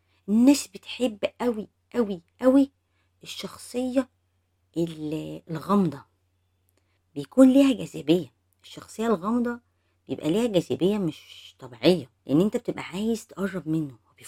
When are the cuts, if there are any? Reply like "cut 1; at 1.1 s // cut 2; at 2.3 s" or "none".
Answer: cut 1; at 12.2 s

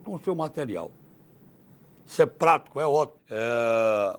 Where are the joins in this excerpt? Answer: cut 1; at 3.2 s

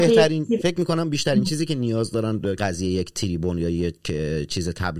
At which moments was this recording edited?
cut 1; at 2.6 s

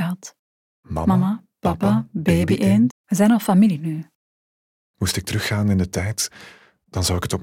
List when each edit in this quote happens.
cut 1; at 2.9 s

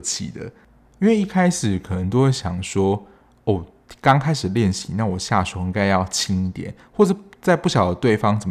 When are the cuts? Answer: none

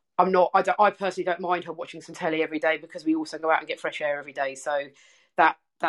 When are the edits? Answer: none

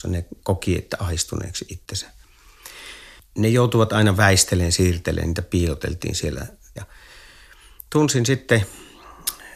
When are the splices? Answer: cut 1; at 6.8 s

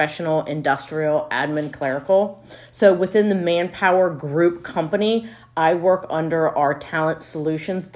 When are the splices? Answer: cut 1; at 2.7 s

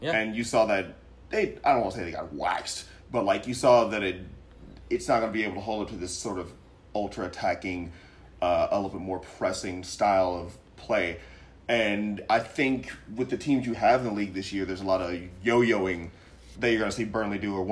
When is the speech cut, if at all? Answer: none

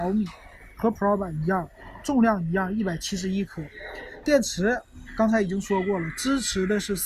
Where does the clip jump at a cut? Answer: cut 1; at 4.2 s

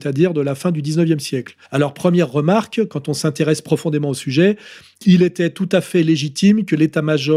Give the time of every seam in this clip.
cut 1; at 1.6 s

